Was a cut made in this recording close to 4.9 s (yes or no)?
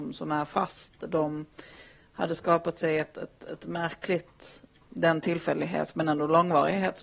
yes